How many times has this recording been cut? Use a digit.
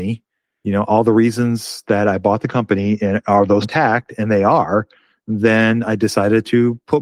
1